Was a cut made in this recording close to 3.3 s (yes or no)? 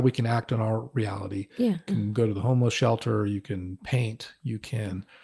no